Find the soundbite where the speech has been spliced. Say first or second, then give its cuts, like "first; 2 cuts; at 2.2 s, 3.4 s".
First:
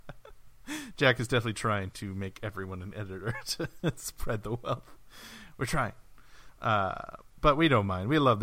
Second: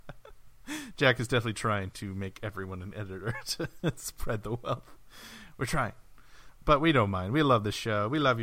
second; 1 cut; at 6.6 s